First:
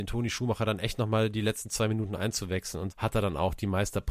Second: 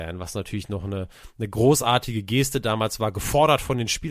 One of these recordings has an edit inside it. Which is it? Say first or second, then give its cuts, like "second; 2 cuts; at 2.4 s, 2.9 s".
first; 1 cut; at 2.9 s